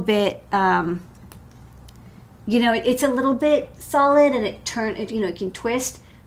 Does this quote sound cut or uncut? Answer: uncut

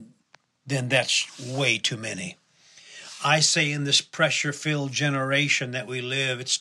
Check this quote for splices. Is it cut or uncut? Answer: uncut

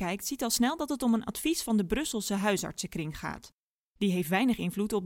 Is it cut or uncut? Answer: uncut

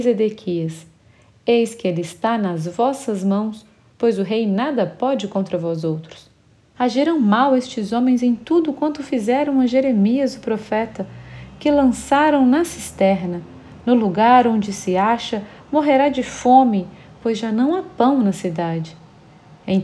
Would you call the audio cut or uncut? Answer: cut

